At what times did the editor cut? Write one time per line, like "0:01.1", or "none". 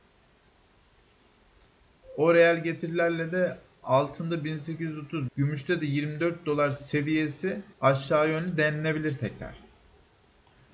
0:05.3
0:07.7